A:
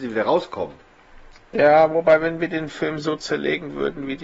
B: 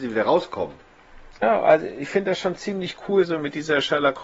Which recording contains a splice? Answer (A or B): B